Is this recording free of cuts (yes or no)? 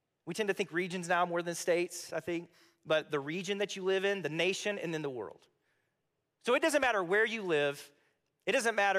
yes